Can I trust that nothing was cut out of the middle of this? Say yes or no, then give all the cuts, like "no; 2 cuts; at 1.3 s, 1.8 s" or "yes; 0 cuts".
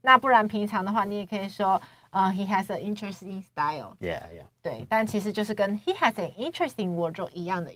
yes; 0 cuts